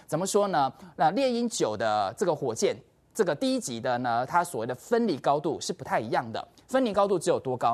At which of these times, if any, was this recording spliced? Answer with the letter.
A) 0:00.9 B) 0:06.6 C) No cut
C